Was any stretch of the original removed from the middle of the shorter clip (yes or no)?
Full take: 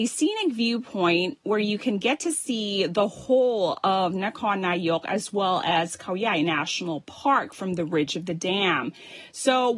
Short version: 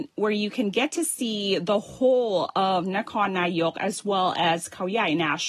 no